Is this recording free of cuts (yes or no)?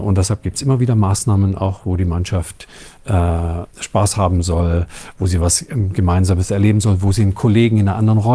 yes